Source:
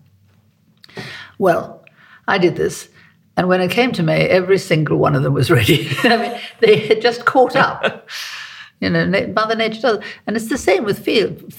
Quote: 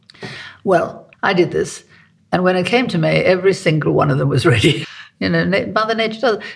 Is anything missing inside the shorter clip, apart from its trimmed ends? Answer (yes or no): yes